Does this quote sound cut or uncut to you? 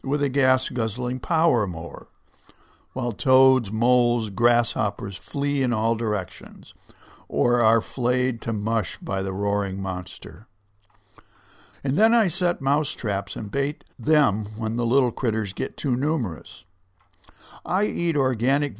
cut